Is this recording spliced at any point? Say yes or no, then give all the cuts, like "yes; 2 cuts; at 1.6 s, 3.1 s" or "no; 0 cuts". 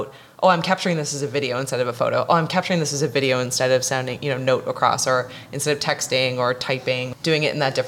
yes; 1 cut; at 4.2 s